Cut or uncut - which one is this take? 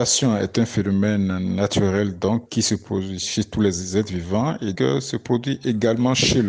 cut